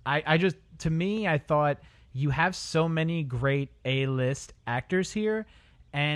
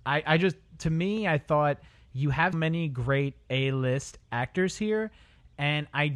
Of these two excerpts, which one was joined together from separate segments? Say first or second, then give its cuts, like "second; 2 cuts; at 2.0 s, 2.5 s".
second; 1 cut; at 2.5 s